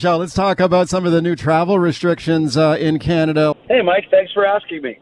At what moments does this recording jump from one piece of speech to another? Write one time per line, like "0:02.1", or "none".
0:03.5